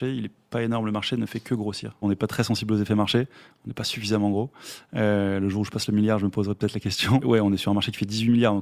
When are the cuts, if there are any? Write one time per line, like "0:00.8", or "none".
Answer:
0:02.0
0:07.2